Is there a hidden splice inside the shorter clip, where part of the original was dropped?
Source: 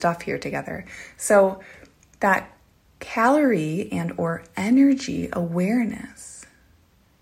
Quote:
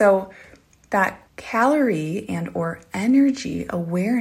yes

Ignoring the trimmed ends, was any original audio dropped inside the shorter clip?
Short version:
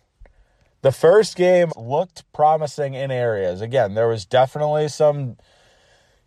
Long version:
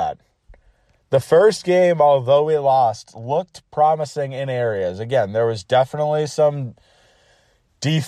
yes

